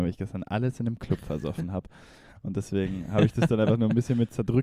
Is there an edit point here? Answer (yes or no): no